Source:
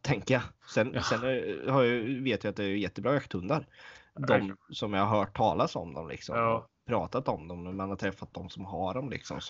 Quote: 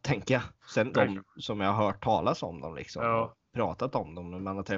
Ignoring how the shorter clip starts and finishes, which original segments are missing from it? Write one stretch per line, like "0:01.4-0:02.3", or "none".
0:00.9-0:04.3